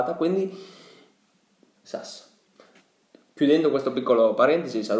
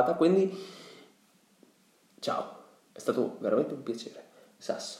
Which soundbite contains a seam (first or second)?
first